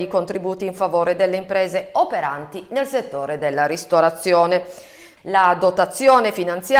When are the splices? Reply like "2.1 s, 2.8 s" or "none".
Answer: 5.2 s